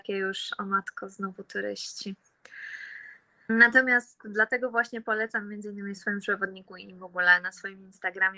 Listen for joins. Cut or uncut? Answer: cut